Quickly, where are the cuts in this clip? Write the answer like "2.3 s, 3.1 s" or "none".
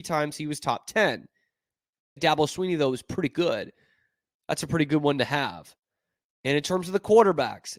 2.2 s